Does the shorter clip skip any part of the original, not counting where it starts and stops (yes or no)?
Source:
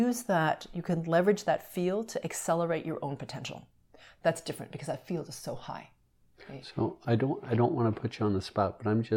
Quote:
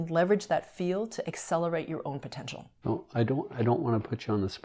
yes